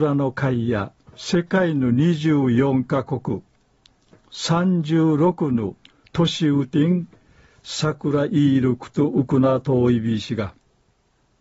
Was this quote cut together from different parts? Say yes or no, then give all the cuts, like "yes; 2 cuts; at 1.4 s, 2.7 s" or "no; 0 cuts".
yes; 1 cut; at 1.1 s